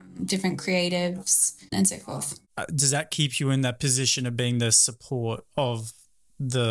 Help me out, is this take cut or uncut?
cut